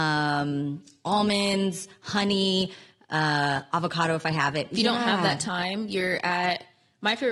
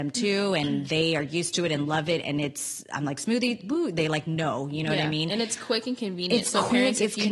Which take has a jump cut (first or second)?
first